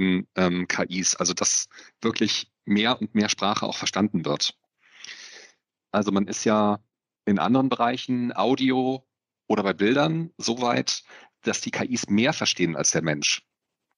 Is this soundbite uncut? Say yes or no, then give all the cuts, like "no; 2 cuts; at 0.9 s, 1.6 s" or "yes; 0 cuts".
no; 1 cut; at 5.8 s